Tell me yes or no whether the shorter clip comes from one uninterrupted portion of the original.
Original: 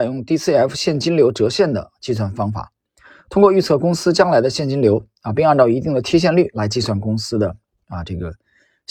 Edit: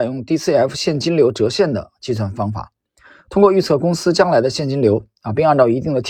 yes